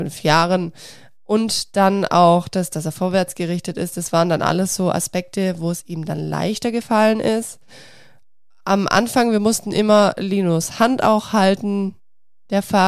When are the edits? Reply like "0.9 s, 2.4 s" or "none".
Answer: none